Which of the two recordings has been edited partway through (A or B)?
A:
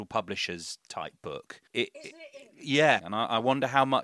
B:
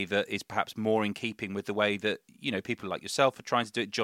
A